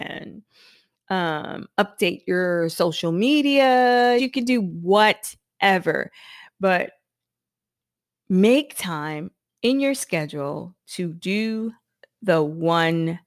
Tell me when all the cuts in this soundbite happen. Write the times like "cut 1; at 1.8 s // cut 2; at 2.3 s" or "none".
cut 1; at 4.2 s